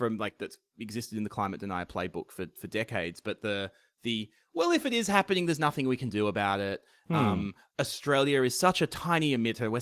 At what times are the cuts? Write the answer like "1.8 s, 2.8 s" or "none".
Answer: none